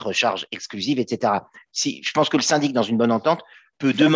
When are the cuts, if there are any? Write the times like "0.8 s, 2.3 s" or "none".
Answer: none